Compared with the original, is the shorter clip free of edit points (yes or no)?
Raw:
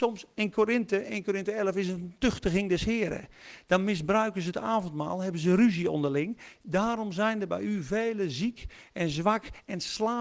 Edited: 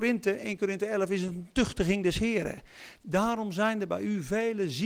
no